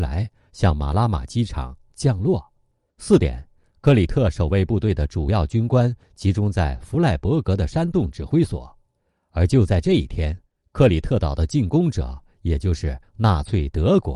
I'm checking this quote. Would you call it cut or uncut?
cut